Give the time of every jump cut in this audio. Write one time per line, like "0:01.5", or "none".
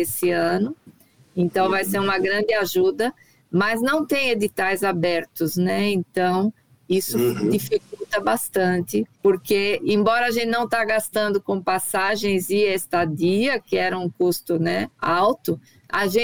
0:09.1
0:14.9